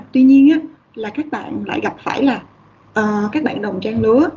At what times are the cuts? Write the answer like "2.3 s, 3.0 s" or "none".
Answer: 3.3 s